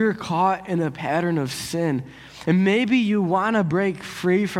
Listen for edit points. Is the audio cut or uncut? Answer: uncut